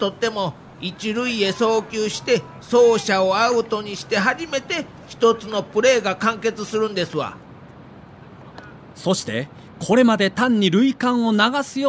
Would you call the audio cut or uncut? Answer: uncut